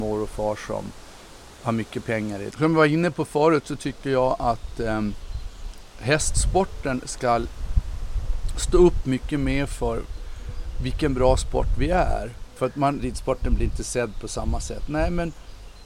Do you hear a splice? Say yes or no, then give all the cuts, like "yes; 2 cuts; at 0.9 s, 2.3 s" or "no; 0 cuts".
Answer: yes; 2 cuts; at 2.5 s, 13.0 s